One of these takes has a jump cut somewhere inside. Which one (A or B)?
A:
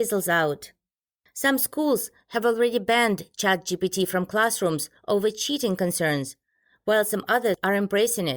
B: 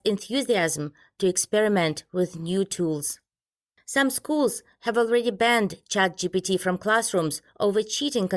A